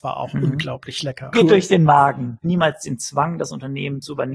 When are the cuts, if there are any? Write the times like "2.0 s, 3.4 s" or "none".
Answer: 1.3 s, 2.4 s